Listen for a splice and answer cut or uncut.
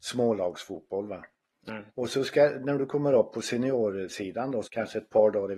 cut